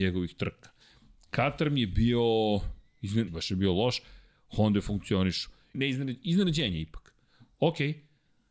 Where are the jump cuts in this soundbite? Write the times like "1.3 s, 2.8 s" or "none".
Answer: 3.3 s, 5.7 s